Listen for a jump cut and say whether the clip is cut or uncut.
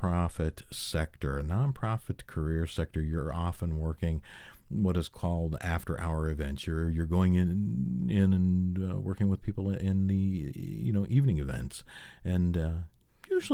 uncut